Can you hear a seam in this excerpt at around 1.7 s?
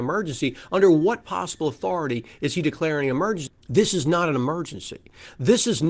no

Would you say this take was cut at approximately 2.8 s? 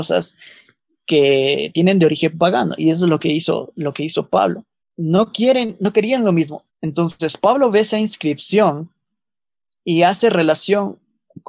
no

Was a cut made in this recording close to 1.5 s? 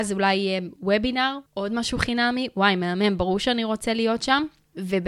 yes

